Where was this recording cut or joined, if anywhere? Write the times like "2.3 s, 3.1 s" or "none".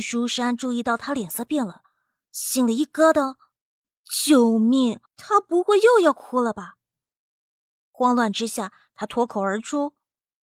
5.1 s